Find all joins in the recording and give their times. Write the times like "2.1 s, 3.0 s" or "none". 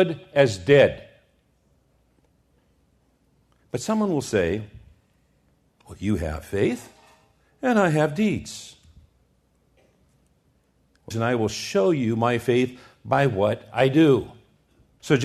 11.1 s